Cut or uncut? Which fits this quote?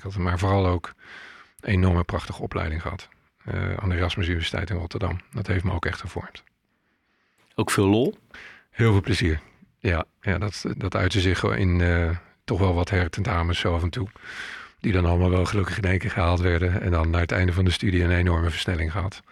cut